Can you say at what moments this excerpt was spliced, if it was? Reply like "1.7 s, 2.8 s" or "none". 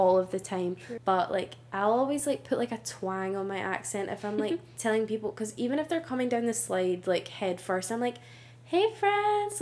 1.0 s